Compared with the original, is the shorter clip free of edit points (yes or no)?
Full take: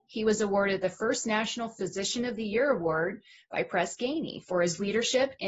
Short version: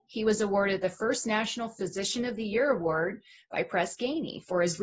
yes